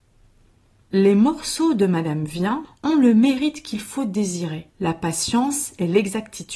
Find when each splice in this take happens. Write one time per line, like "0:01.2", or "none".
0:02.6
0:04.7